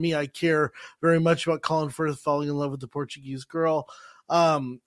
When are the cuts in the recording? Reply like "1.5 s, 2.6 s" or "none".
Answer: none